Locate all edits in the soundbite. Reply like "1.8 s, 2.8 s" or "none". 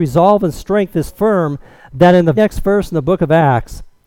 1.1 s, 2.4 s